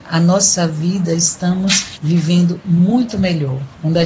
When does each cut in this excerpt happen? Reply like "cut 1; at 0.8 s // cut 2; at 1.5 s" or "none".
none